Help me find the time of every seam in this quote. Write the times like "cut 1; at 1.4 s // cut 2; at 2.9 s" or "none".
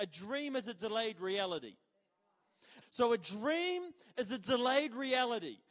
cut 1; at 2.8 s